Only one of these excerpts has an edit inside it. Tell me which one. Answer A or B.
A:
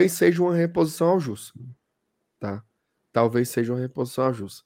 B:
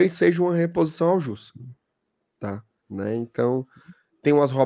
B